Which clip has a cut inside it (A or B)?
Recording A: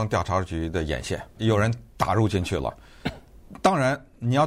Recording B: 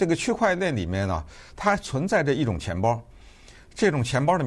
A